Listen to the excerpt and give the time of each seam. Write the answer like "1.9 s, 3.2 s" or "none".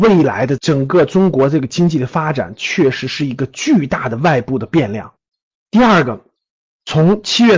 none

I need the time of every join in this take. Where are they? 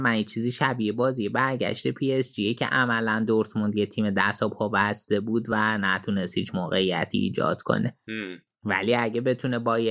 none

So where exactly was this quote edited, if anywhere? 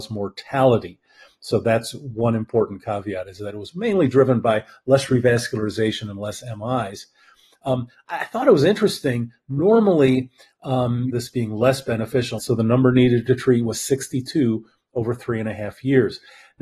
11.1 s, 12.4 s

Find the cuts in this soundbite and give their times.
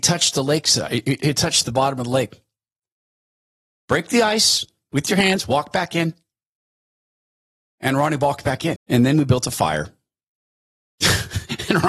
8.8 s

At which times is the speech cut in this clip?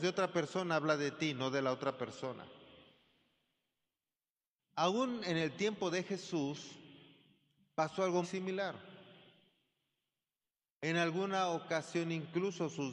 4.6 s, 8.2 s

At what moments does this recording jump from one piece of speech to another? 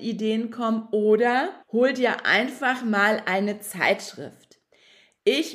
1.6 s

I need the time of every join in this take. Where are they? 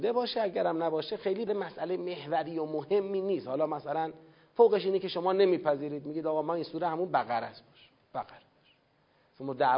1.5 s

